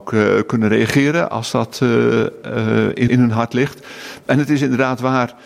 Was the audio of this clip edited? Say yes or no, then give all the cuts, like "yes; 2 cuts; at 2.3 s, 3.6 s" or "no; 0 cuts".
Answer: yes; 1 cut; at 3.1 s